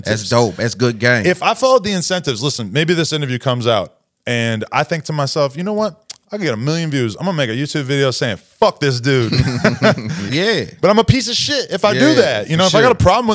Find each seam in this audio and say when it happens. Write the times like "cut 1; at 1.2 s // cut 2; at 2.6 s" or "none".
cut 1; at 10.3 s